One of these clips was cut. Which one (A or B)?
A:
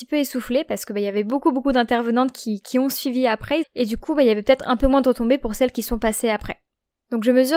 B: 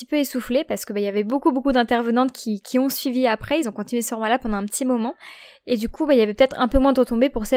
A